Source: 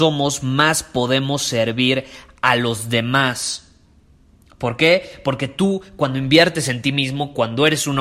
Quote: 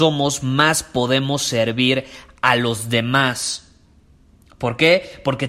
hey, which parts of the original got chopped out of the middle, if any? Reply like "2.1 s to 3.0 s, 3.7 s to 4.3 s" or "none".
none